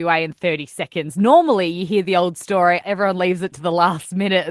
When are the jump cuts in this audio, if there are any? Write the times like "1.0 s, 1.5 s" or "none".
2.8 s